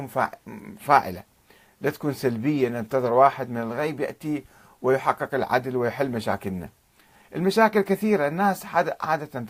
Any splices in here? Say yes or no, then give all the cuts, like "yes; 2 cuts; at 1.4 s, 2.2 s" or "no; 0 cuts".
no; 0 cuts